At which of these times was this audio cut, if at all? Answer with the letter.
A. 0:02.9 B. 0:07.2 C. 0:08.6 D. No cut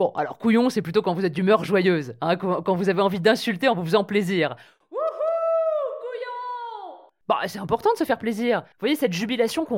D